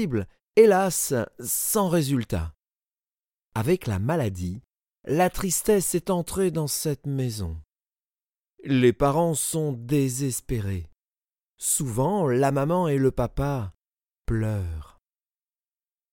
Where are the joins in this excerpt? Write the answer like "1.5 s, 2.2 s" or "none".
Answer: none